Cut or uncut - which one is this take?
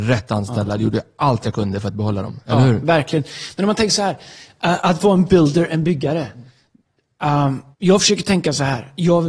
cut